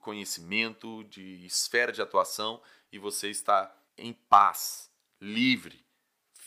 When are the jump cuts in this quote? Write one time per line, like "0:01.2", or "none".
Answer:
0:03.9